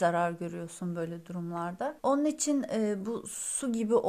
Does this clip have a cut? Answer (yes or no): yes